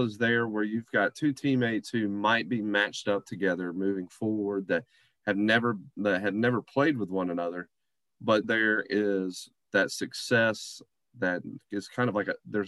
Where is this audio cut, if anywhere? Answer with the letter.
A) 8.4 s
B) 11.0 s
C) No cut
A